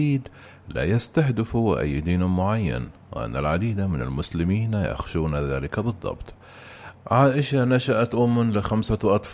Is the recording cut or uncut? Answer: cut